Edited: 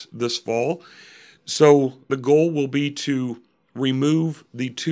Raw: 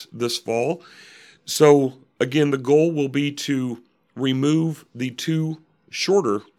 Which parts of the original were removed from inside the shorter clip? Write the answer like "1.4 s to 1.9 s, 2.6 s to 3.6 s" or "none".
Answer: 2.1 s to 2.5 s